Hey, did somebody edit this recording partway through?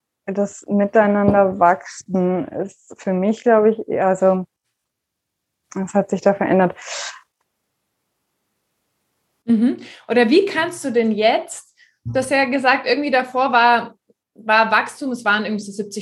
yes; 1 cut; at 9.4 s

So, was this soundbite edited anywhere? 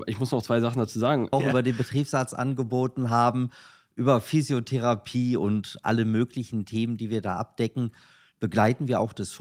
yes; 1 cut; at 1.3 s

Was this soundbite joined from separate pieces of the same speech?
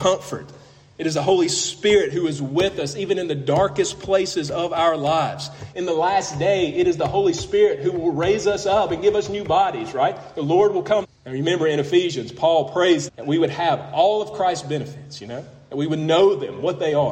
yes; 3 cuts; at 5.7 s, 11.0 s, 13.1 s

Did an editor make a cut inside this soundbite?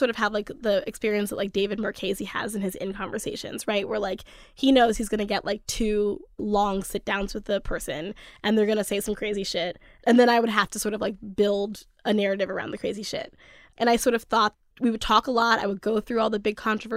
no; 0 cuts

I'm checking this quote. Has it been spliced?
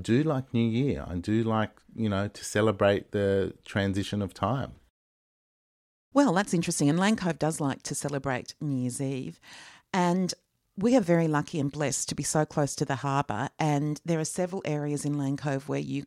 no; 0 cuts

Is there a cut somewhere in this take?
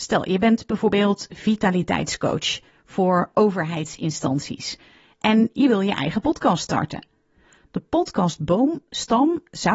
no; 0 cuts

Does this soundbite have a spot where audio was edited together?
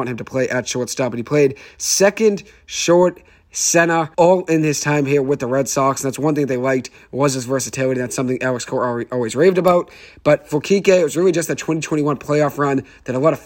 yes; 1 cut; at 4.1 s

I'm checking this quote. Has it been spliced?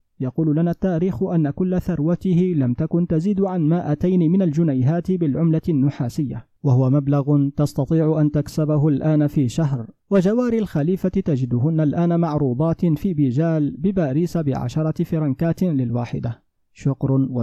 yes; 1 cut; at 10.0 s

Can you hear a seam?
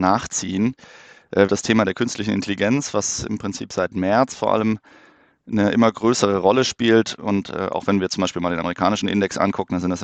yes; 1 cut; at 1.5 s

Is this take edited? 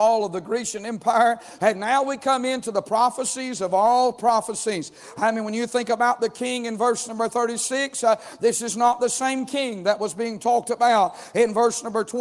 yes; 1 cut; at 1.6 s

